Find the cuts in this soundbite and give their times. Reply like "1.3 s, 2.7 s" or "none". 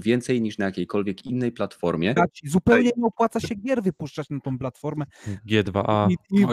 2.2 s